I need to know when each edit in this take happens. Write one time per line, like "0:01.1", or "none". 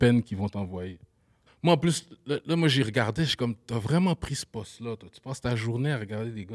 0:01.5

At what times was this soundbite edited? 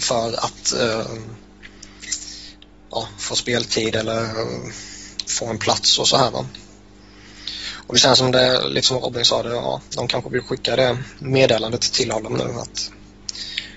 none

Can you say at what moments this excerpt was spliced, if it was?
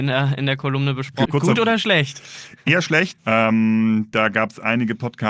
0:01.3
0:03.2

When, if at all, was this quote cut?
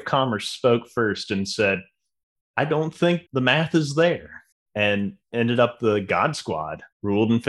none

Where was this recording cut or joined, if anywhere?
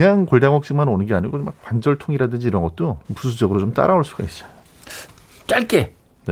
0:03.0

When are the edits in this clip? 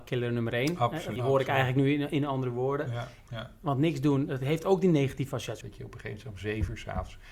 0:01.2
0:03.3
0:05.6

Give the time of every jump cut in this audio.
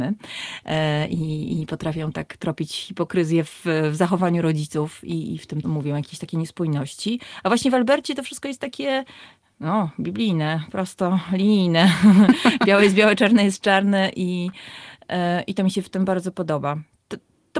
0:05.6

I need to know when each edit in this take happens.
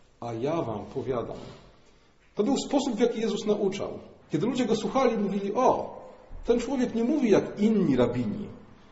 0:04.2

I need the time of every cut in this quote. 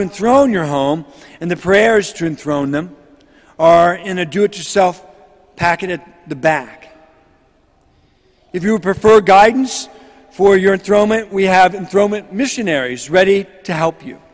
none

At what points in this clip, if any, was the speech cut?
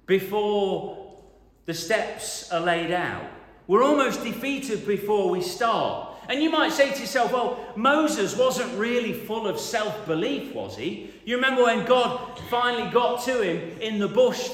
none

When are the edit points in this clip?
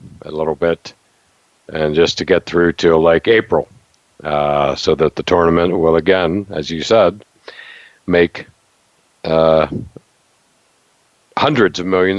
none

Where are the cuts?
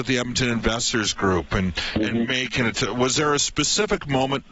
none

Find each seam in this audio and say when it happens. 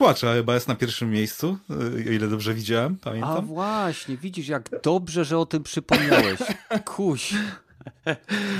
none

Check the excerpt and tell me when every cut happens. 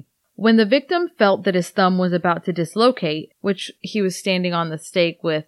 0:03.3

